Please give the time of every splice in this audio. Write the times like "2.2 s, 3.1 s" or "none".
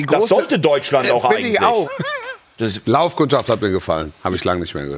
1.8 s